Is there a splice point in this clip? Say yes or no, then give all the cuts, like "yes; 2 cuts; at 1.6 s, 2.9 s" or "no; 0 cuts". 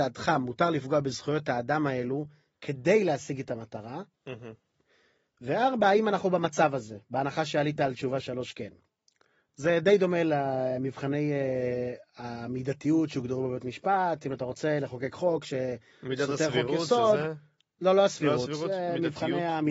no; 0 cuts